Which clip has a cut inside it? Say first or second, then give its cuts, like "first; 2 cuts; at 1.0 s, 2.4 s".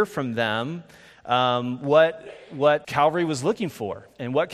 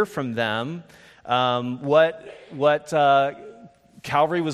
first; 1 cut; at 2.8 s